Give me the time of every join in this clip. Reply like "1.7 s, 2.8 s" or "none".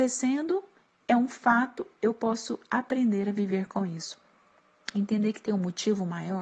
none